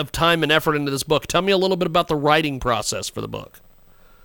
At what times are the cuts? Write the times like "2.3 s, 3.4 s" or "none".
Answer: none